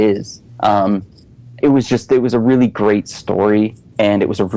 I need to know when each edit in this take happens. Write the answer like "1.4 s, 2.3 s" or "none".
1.6 s

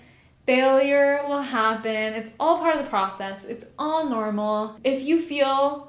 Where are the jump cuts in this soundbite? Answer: none

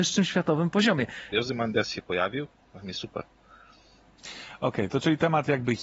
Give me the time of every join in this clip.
1.3 s

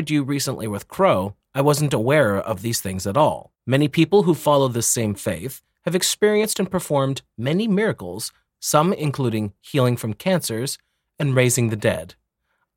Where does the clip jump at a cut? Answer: 3.5 s

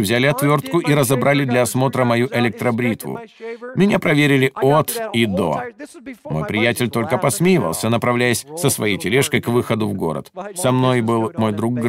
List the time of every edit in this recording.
10.5 s

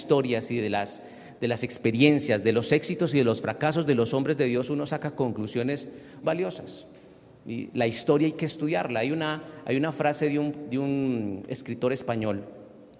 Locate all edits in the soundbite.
6.2 s

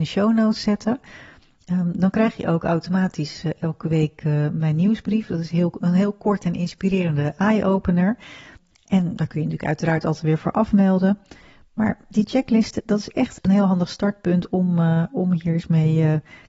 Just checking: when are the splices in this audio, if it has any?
none

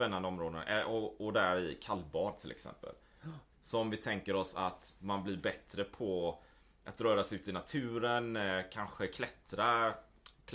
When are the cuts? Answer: 3.5 s

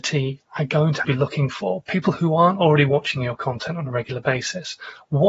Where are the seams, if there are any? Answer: 1.0 s

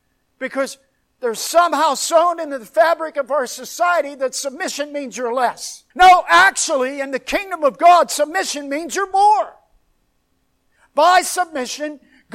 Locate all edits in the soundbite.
5.9 s

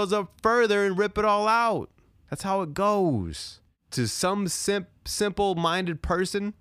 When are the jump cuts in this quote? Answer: none

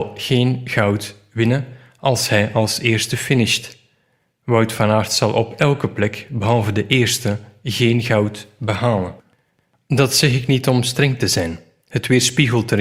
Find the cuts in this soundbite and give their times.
none

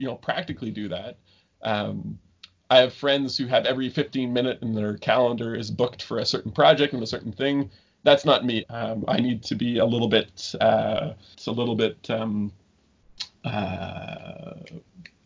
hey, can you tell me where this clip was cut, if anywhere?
8.6 s, 11.3 s

